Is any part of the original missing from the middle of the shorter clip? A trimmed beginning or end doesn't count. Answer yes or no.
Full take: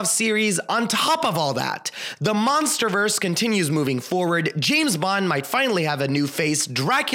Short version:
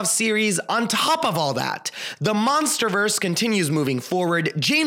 no